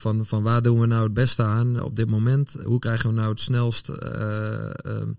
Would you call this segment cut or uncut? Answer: cut